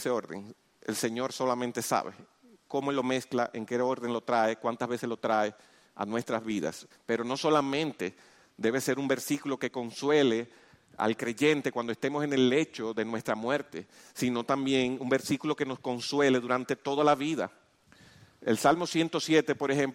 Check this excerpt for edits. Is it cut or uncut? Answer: cut